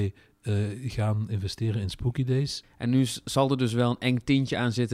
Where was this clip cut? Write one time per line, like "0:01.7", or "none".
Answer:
0:02.6